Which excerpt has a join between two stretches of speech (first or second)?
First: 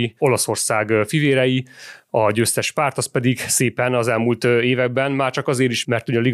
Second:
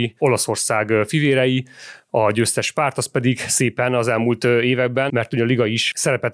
second